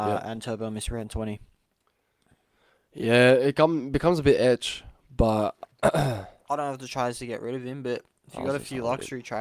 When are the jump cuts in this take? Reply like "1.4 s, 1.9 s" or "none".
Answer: none